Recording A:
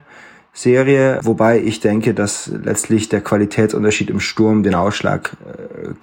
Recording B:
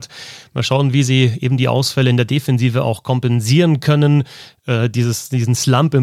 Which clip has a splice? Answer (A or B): A